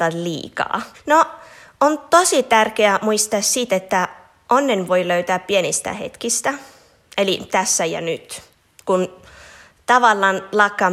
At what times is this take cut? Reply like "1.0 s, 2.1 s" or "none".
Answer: 0.9 s